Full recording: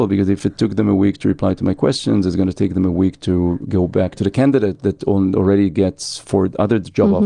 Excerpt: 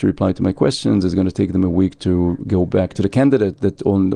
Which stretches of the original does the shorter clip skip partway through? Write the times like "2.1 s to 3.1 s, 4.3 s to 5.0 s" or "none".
none

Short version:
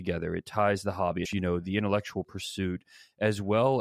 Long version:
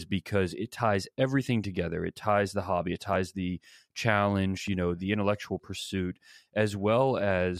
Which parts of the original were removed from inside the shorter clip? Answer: 2.9 s to 4.6 s

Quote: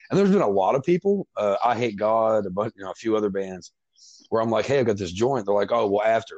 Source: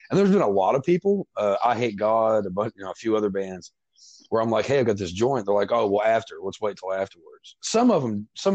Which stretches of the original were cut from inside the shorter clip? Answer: none

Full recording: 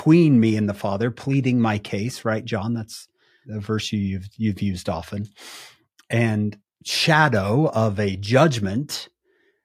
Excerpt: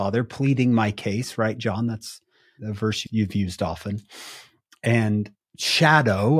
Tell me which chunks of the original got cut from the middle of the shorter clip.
3.9 s to 4.3 s

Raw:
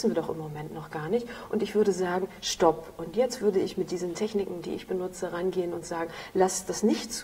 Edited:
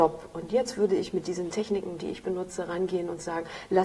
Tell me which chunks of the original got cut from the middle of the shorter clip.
none

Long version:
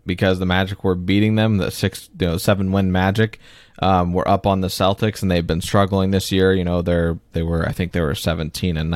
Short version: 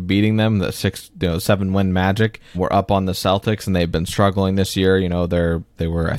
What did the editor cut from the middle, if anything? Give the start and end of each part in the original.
3.5 s to 4.1 s

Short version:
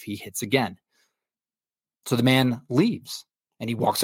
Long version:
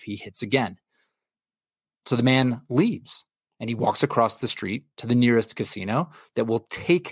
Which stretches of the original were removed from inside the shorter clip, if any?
none

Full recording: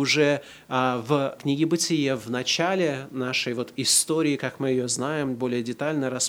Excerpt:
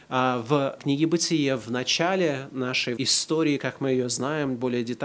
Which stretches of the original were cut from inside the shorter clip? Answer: 3.6 s to 3.7 s

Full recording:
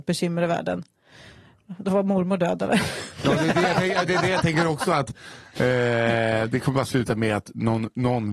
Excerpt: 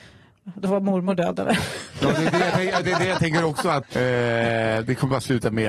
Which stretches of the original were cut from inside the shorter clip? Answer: 5.1 s to 5.5 s

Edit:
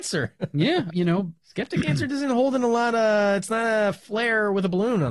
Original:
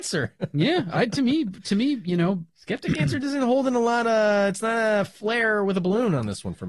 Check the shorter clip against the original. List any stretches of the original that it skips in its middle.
0.9 s to 2.0 s

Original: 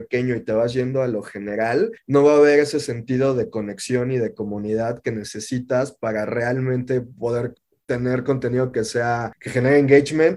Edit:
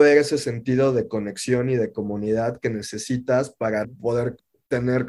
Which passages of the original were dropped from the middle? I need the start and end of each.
6.3 s to 7.0 s

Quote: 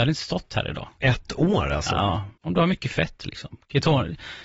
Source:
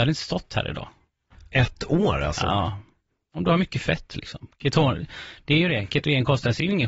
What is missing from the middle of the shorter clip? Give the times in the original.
0.9 s to 1.5 s, 2.9 s to 3.2 s

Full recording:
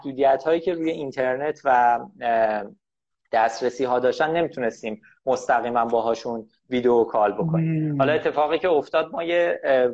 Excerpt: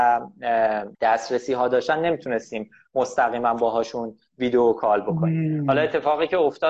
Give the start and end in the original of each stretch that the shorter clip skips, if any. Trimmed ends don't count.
2.7 s to 3.3 s

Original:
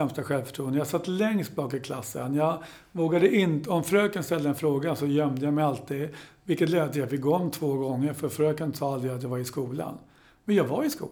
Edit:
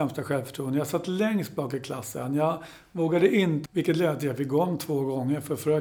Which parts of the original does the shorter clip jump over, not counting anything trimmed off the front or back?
3.7 s to 6.4 s

